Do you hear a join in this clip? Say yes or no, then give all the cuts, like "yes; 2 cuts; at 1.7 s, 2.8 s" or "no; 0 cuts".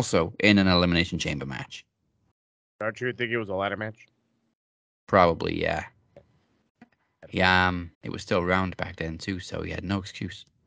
yes; 1 cut; at 7.9 s